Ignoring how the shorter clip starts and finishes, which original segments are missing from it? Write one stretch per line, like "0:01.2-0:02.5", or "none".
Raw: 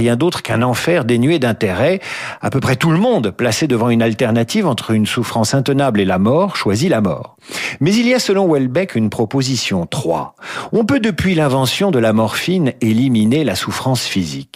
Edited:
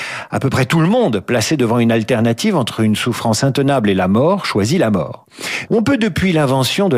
0:07.8-0:10.7

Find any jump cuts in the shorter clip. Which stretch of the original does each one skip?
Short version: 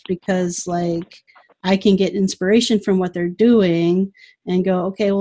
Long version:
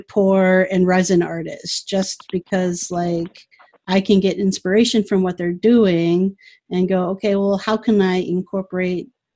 none

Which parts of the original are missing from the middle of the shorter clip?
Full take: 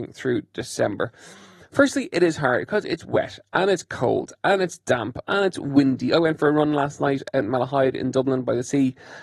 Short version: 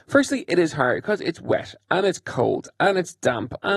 none

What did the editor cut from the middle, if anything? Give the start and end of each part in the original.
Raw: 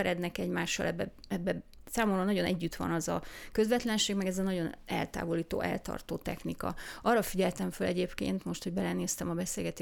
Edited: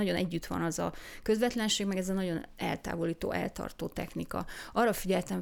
none

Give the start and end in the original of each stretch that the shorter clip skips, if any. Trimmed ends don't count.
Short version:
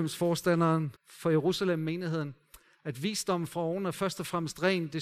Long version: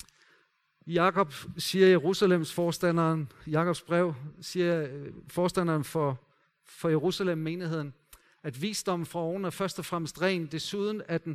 0:03.3-0:06.5

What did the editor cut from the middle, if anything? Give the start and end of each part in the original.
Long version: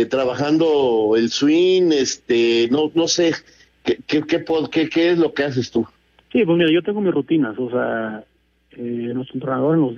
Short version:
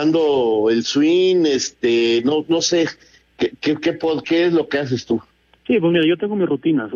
0:04.7-0:04.9

